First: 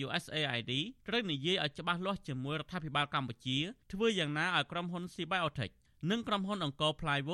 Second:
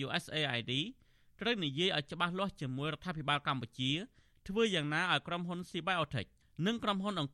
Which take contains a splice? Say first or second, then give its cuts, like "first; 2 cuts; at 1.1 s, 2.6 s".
first; 2 cuts; at 1.0 s, 3.8 s